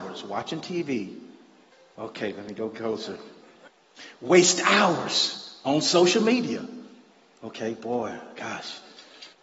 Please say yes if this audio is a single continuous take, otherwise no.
yes